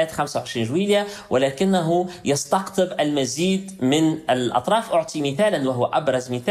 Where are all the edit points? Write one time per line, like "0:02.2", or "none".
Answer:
none